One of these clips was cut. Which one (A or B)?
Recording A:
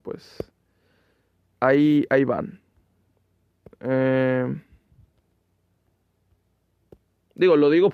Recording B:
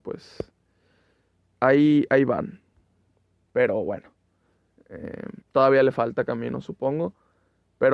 B